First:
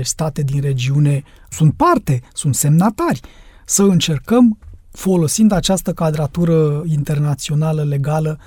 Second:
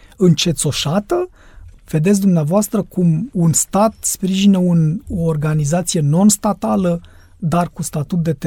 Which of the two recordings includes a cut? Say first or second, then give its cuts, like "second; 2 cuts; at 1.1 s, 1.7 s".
second; 1 cut; at 1.8 s